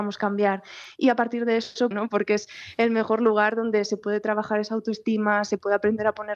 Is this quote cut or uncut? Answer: cut